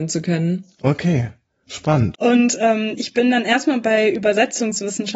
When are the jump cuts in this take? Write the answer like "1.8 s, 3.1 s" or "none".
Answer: 2.1 s